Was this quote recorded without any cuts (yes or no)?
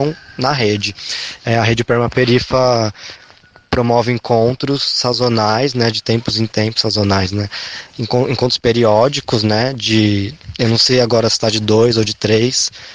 no